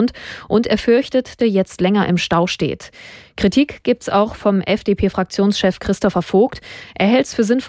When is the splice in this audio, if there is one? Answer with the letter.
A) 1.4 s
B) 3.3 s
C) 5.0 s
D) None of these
A